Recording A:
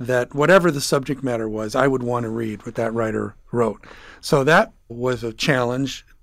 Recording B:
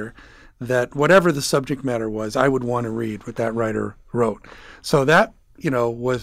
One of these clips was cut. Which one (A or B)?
A